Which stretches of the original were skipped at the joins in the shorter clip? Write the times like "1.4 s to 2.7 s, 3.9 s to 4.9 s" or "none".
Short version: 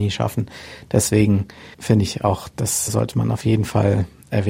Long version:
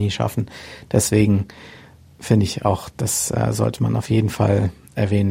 1.7 s to 2.1 s, 3.3 s to 3.5 s